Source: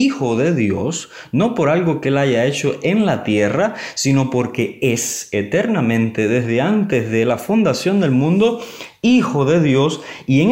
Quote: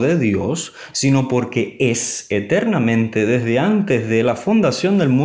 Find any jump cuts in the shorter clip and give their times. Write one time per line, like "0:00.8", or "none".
0:00.9

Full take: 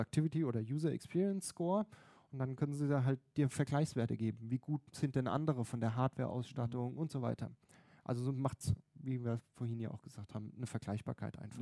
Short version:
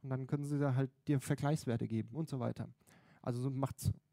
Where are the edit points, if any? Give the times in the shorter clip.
0:02.1

